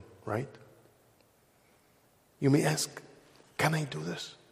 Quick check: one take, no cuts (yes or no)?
no